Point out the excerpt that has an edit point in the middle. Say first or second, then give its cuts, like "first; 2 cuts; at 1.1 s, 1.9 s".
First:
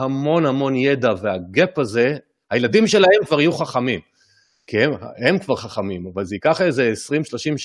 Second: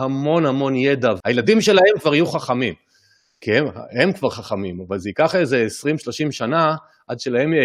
second; 1 cut; at 1.2 s